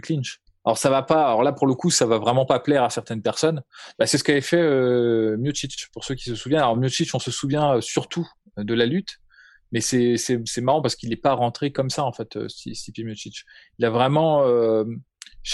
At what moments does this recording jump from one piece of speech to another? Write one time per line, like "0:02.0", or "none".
0:03.9

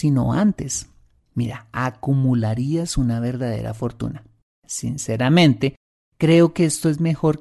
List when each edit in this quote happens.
none

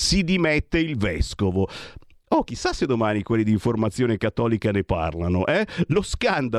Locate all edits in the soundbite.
none

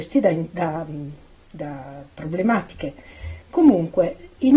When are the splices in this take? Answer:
none

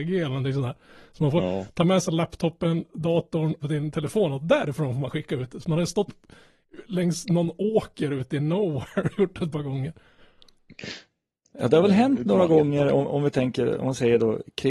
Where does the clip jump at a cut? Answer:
0:03.6

